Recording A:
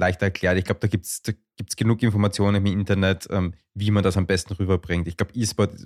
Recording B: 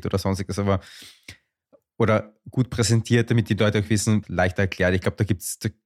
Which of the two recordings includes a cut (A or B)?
B